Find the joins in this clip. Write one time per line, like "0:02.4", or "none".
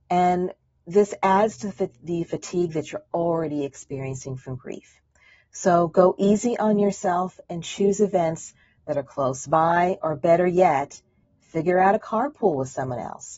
none